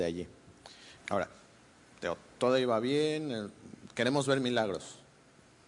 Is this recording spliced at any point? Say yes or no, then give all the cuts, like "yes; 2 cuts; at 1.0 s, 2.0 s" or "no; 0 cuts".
yes; 1 cut; at 1.0 s